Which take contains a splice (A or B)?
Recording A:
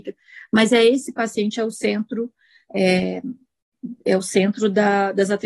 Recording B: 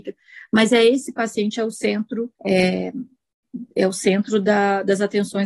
B